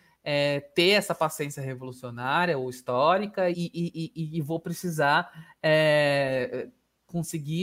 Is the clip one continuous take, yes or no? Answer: no